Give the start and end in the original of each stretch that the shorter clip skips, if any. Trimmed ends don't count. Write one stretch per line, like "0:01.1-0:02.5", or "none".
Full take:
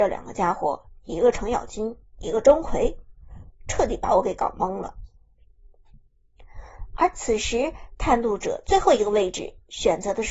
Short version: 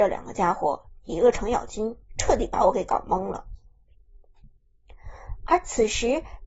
0:02.1-0:03.6